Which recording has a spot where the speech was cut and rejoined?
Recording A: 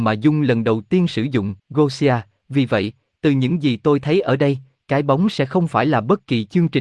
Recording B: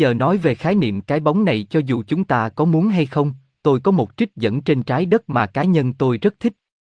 A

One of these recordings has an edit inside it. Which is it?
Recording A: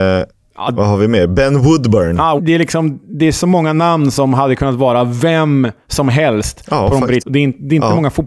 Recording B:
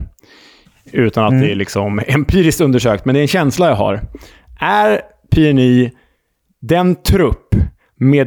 A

